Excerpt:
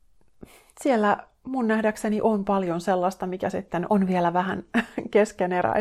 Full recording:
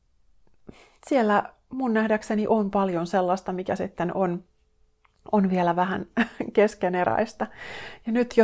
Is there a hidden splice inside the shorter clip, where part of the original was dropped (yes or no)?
yes